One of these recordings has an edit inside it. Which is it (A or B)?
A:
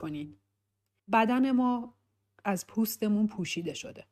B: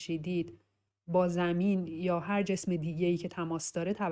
A